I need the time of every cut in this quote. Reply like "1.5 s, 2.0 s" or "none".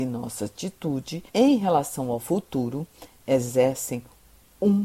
1.3 s